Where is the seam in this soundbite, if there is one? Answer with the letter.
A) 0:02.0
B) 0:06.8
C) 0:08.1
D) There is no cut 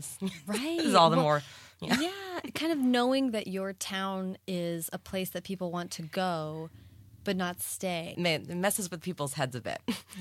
C